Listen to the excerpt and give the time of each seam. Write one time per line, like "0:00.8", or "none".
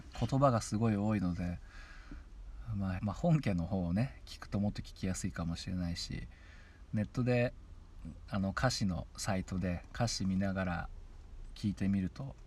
0:03.0

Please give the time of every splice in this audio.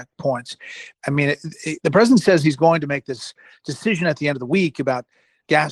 0:00.9

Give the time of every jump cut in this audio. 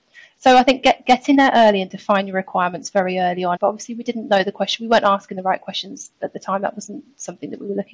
0:03.6

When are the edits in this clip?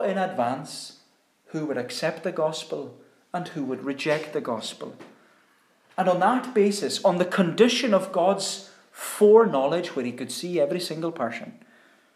none

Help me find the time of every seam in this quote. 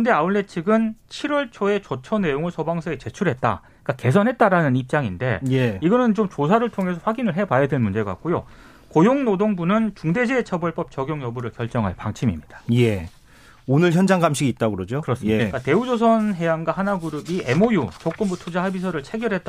0:15.4

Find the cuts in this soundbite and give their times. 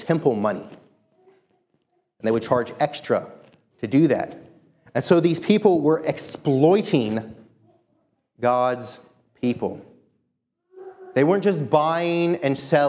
none

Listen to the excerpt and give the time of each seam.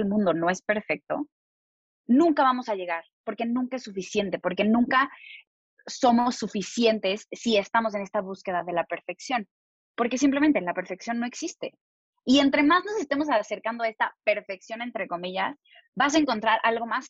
none

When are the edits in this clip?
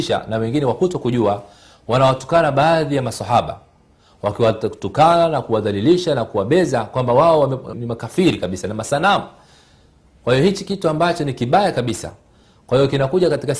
0:07.7

